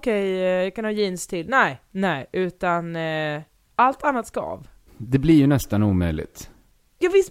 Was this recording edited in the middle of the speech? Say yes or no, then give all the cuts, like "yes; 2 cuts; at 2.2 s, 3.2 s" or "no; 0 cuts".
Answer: yes; 1 cut; at 4.9 s